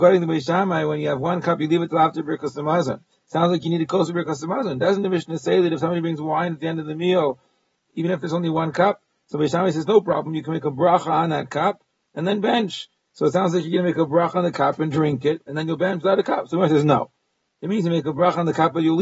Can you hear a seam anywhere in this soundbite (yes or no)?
no